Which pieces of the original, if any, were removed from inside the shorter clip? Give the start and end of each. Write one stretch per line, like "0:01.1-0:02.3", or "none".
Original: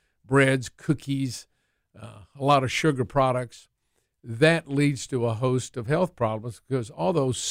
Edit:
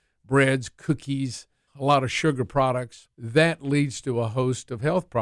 0:01.7-0:02.3
0:03.7-0:04.2